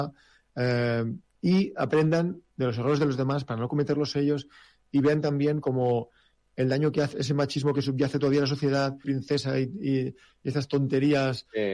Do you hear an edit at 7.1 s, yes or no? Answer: yes